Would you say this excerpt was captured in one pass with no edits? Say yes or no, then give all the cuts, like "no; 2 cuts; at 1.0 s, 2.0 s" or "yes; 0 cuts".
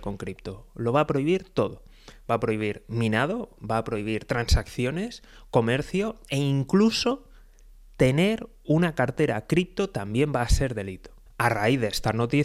no; 1 cut; at 11.3 s